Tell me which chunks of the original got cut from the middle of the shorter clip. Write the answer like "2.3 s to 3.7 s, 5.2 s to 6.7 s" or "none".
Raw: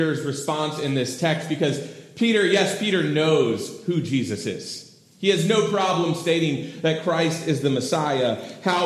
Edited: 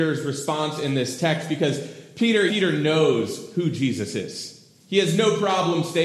2.5 s to 2.8 s